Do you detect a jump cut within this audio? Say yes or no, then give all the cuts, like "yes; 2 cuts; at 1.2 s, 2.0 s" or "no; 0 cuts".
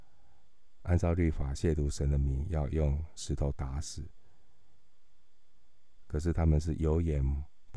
no; 0 cuts